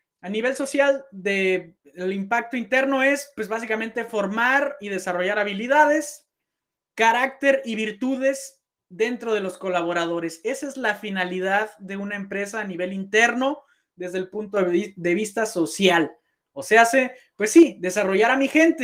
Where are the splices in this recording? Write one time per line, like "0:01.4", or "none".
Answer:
0:01.8